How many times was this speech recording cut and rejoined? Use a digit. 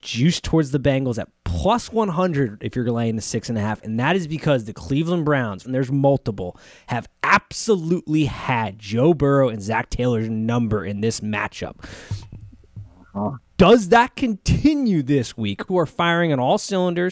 2